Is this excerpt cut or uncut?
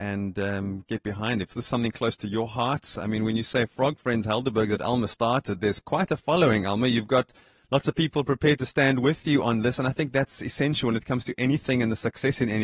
uncut